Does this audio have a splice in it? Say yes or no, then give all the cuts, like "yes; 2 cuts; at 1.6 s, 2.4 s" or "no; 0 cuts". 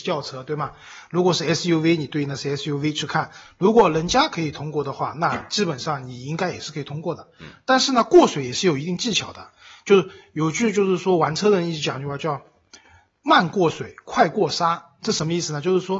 no; 0 cuts